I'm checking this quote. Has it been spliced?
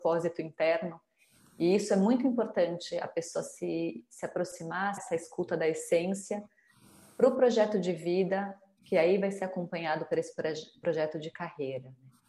yes; 1 cut; at 5.0 s

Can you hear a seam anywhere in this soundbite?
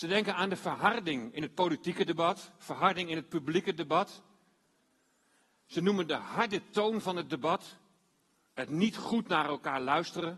no; 0 cuts

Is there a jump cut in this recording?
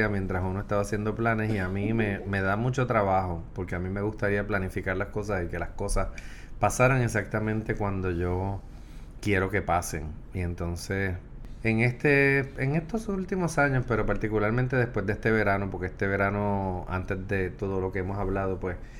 no; 0 cuts

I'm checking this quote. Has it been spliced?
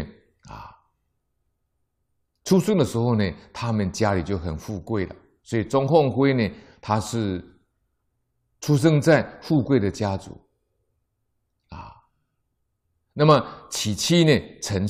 no; 0 cuts

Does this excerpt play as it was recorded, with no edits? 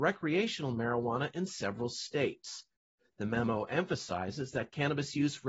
yes; 0 cuts

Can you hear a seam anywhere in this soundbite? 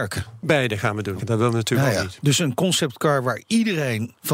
yes; 1 cut; at 1.2 s

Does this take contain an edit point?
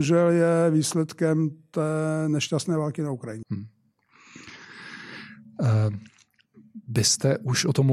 yes; 1 cut; at 3.4 s

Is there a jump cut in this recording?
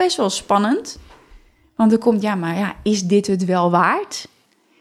no; 0 cuts

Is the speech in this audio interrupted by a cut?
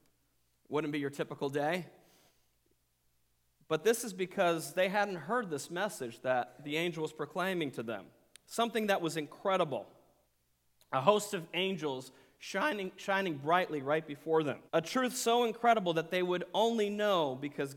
yes; 1 cut; at 14.7 s

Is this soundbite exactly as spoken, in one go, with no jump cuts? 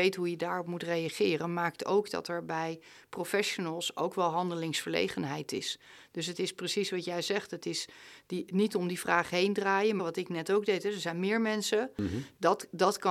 no; 2 cuts; at 8.5 s, 10.0 s

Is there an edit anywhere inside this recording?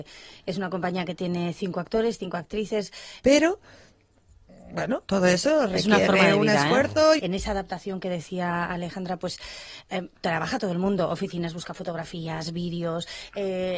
yes; 2 cuts; at 3.2 s, 7.2 s

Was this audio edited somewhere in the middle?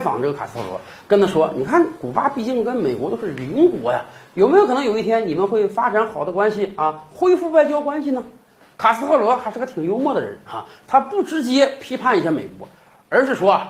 no; 0 cuts

